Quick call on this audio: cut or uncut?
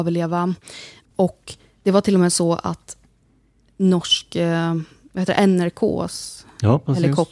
cut